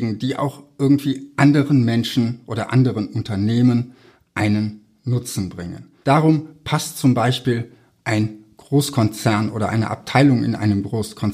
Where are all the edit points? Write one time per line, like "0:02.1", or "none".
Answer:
0:06.0